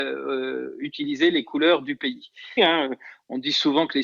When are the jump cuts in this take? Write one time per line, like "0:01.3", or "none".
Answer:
0:02.6